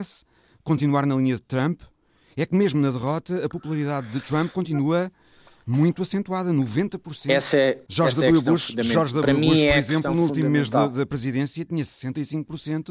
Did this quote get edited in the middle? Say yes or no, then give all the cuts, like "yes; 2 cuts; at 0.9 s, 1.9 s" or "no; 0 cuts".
no; 0 cuts